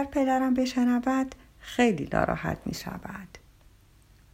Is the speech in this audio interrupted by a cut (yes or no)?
no